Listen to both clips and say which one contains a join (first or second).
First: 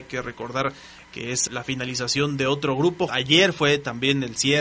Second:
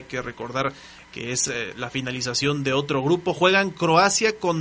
first